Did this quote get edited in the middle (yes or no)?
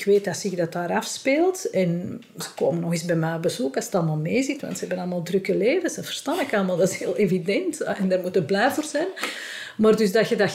no